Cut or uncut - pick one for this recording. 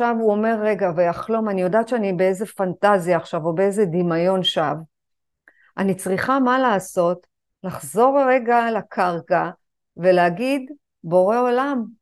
uncut